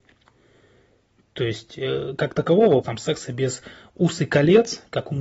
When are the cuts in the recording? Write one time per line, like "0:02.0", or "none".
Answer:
0:02.8

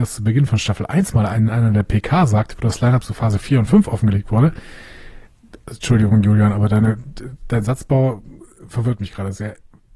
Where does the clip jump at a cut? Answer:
none

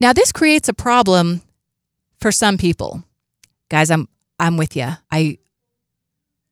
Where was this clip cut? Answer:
0:03.5
0:05.0

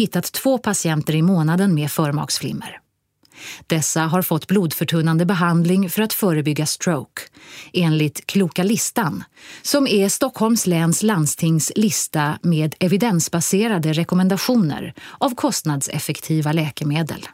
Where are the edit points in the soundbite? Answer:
none

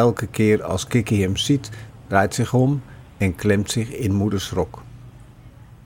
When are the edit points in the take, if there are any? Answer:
0:01.9

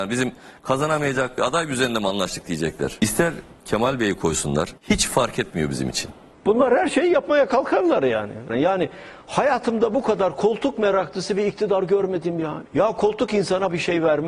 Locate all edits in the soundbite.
0:08.5
0:12.7

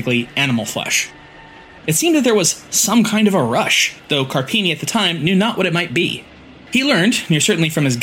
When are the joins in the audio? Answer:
0:01.8
0:06.7

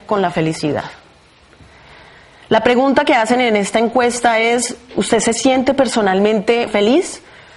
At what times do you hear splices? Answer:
0:06.7

